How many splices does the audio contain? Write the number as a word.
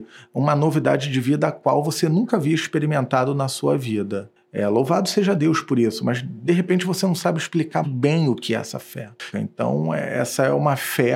two